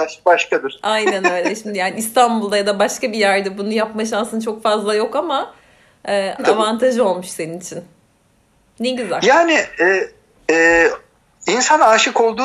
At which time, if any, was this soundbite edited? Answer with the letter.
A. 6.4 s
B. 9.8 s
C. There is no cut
A